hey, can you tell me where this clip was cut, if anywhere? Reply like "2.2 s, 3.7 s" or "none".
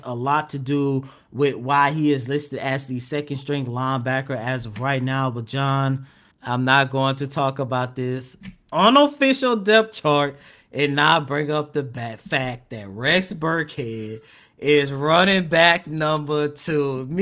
6.3 s

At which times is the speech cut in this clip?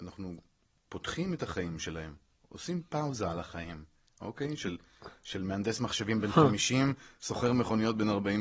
none

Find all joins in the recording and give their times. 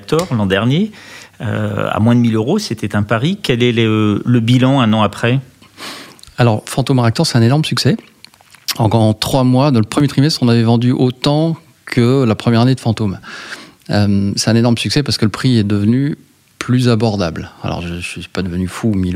none

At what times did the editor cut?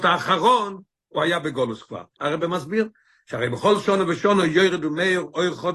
2.2 s

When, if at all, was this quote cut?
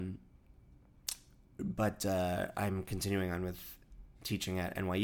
none

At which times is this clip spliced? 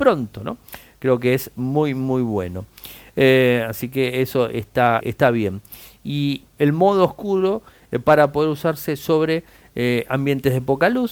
5.0 s, 6.4 s

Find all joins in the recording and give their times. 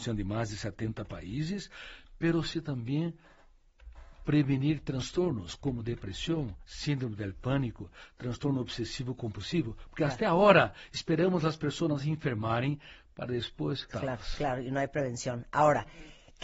13.9 s

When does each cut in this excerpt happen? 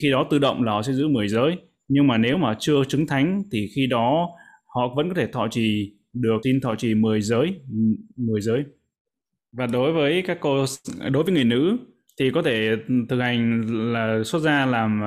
6.4 s

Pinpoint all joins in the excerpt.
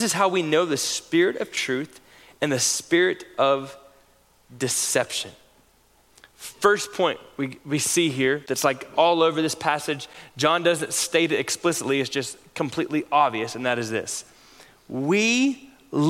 none

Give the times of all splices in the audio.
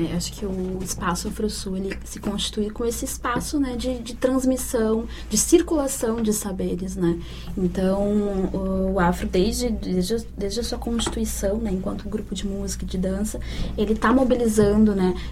none

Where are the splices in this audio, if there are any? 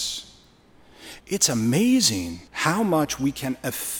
1.2 s, 2.5 s

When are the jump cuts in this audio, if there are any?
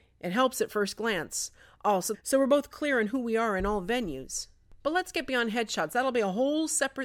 2.1 s

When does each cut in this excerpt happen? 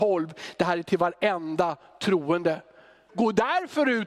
3.1 s

